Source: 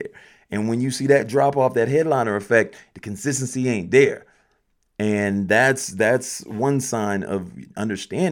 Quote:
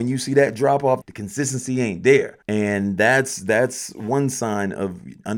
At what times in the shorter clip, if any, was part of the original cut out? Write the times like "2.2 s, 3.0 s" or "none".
1.0 s, 2.4 s